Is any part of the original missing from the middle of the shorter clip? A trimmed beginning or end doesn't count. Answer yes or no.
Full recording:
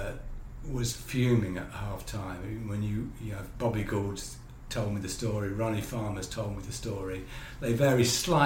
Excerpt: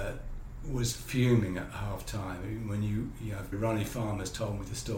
yes